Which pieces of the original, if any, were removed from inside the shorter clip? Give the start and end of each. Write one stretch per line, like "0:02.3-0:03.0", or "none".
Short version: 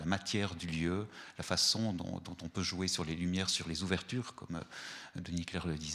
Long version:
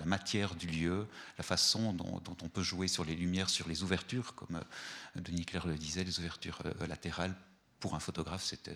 none